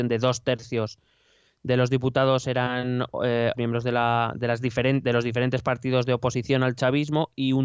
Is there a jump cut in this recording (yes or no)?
yes